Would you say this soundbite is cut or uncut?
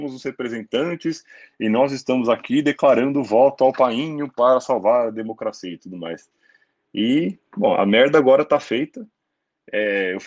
uncut